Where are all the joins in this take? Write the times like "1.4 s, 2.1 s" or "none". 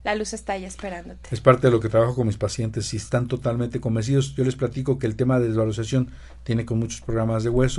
none